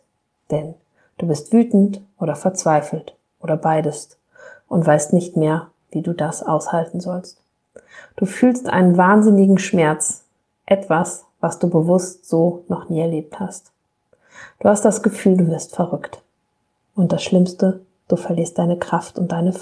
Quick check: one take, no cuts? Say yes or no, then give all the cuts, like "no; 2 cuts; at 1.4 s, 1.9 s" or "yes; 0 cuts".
yes; 0 cuts